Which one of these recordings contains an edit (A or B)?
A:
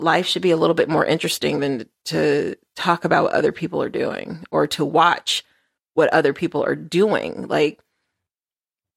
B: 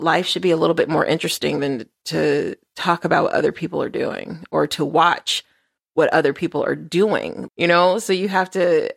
B